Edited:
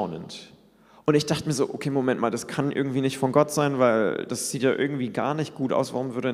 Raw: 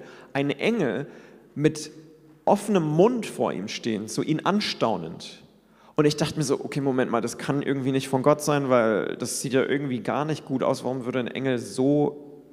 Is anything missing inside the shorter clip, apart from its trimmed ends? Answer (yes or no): no